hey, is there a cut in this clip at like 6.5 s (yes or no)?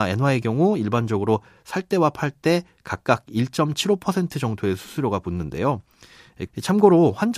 yes